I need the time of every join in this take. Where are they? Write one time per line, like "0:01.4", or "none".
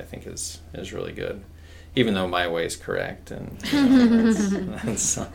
none